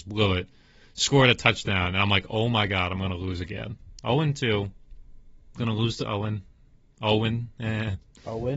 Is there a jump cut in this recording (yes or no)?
no